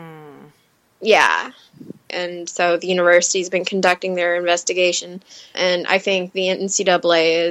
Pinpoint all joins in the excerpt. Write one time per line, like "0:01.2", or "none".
0:02.1
0:05.5